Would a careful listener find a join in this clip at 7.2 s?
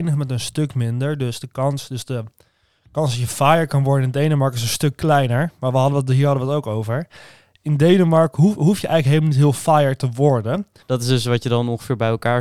no; 1 cut; at 10.8 s

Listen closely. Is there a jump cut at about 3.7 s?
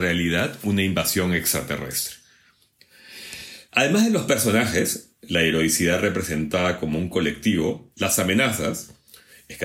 yes; 2 cuts; at 3.7 s, 7.9 s

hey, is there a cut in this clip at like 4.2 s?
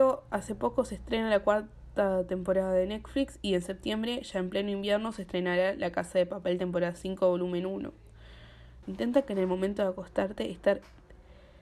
no; 1 cut; at 8.8 s

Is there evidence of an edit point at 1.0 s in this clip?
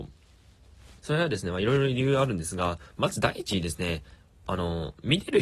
yes; 1 cut; at 1.0 s

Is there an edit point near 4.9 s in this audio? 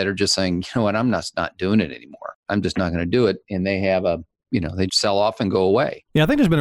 yes; 2 cuts; at 2.4 s, 4.9 s

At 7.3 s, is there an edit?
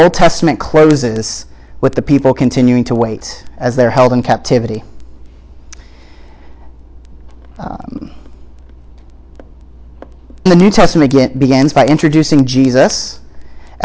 no; 1 cut; at 10.5 s

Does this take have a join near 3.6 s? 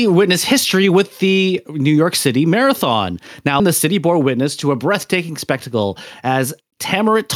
yes; 1 cut; at 3.6 s

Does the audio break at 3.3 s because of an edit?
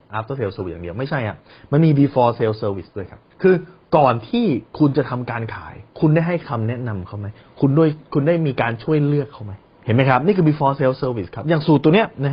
yes; 2 cuts; at 3.3 s, 5.9 s

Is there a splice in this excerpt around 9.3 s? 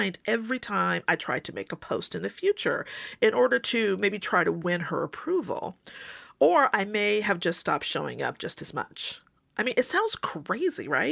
no; 0 cuts

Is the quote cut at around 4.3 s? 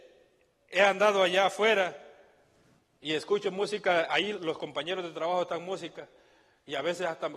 yes; 1 cut; at 4.3 s

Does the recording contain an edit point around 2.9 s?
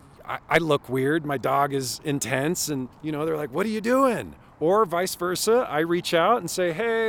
yes; 1 cut; at 2.9 s

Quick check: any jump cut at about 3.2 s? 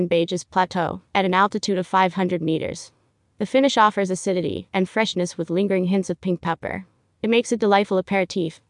yes; 1 cut; at 3.2 s

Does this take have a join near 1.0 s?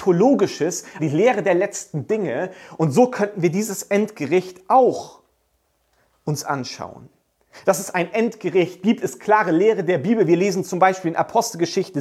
yes; 1 cut; at 1.0 s

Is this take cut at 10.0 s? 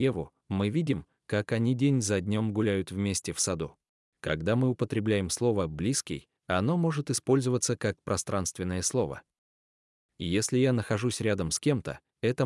no; 1 cut; at 4.1 s

